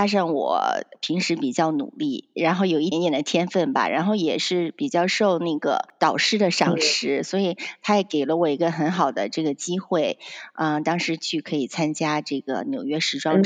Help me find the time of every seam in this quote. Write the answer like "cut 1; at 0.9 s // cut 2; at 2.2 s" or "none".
cut 1; at 2.9 s